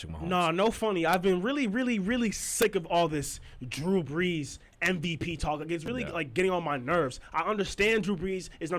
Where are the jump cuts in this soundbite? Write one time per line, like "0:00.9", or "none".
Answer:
none